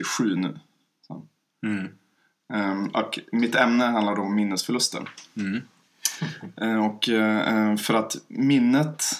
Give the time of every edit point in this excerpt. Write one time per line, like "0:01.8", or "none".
none